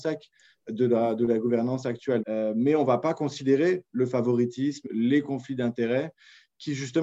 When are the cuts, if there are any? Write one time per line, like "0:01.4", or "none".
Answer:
0:02.2
0:04.8